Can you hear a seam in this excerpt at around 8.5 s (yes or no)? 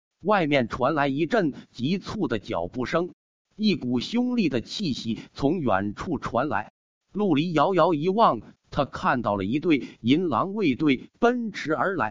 yes